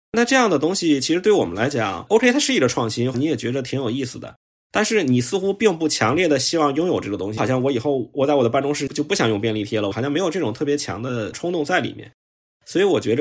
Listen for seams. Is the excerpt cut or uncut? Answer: cut